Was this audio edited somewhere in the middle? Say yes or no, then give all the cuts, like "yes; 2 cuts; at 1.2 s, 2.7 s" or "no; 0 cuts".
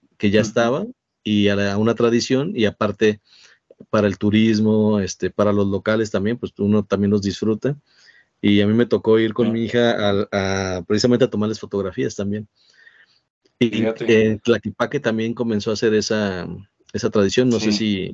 no; 0 cuts